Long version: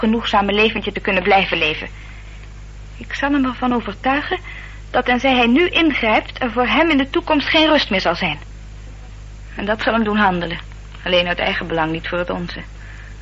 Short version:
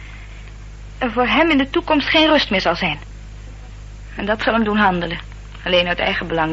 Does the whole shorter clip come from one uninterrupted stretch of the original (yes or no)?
no